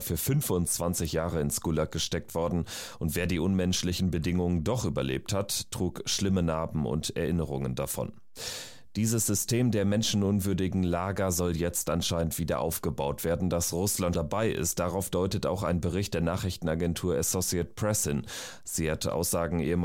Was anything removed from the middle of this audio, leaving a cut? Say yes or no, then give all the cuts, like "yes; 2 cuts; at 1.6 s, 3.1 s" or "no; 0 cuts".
yes; 1 cut; at 14.1 s